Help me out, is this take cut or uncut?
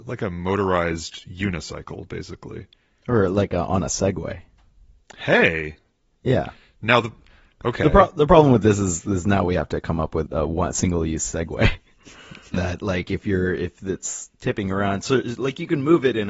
cut